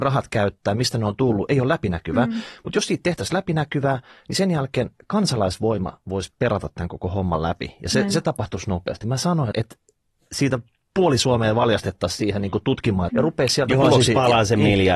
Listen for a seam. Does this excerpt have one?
yes; 2 cuts; at 9.5 s, 13.1 s

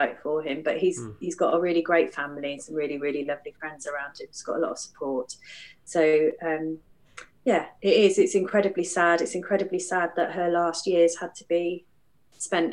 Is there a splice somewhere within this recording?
no; 0 cuts

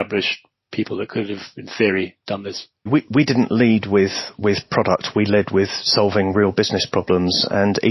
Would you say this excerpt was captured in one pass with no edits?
no; 1 cut; at 2.9 s

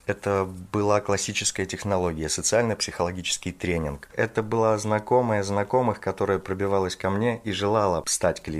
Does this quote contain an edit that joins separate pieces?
yes; 1 cut; at 4.1 s

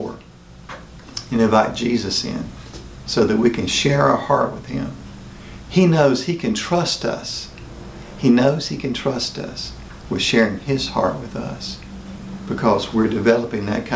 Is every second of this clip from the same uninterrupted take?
yes; 0 cuts

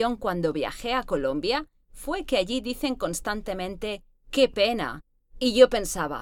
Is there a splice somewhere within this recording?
yes; 1 cut; at 5.2 s

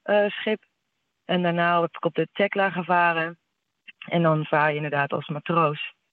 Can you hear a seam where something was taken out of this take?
yes; 1 cut; at 3.9 s

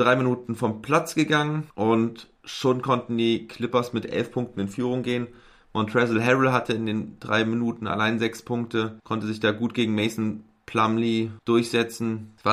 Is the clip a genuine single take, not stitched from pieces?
yes; 0 cuts

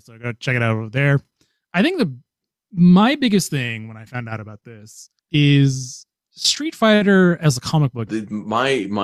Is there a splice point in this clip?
yes; 3 cuts; at 1.7 s, 5.2 s, 8.1 s

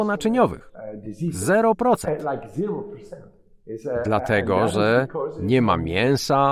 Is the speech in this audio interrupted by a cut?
no; 0 cuts

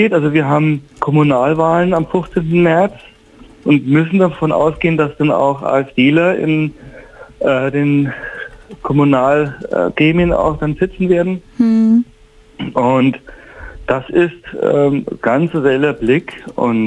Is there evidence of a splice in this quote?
no; 0 cuts

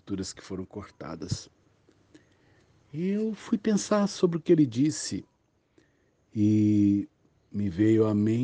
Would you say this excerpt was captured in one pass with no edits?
yes; 0 cuts

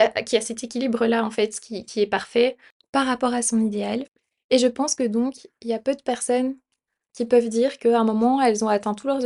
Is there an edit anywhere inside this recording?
no; 0 cuts

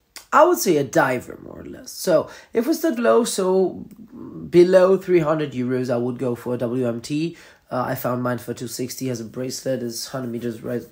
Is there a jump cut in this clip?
yes; 1 cut; at 3.0 s

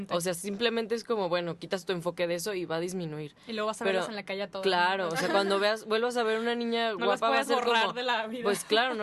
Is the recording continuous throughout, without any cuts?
yes; 0 cuts

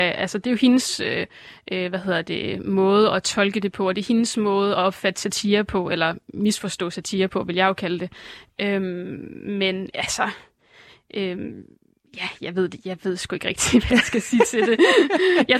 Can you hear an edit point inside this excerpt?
yes; 1 cut; at 8.5 s

